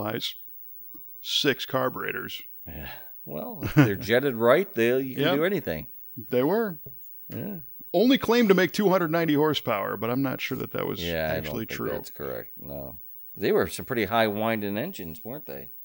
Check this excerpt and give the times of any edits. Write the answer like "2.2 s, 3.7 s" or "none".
none